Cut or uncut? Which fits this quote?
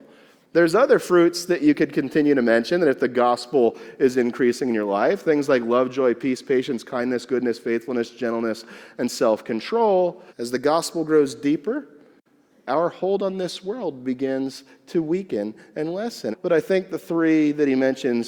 cut